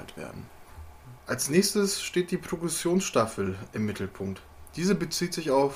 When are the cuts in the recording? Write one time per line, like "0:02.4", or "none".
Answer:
0:01.2